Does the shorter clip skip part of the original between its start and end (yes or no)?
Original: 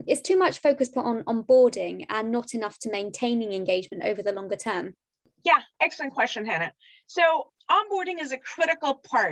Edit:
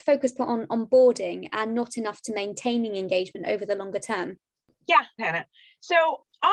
yes